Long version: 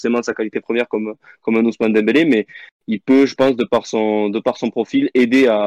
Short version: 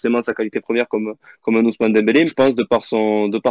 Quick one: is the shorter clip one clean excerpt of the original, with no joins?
no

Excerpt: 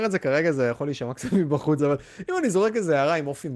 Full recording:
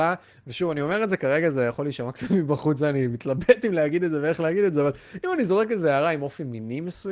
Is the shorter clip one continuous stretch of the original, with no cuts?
no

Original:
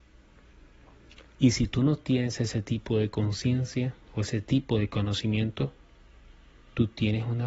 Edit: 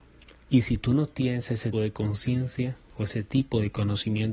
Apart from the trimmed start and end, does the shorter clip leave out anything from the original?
yes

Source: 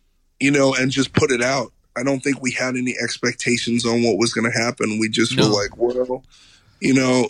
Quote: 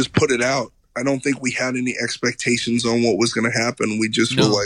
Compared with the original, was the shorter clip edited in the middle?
no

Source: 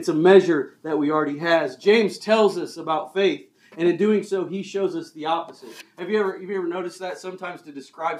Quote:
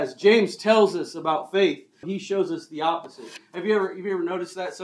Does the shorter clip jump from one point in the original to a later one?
yes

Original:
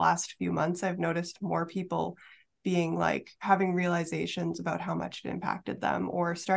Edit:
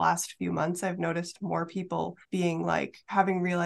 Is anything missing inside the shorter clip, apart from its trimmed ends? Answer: yes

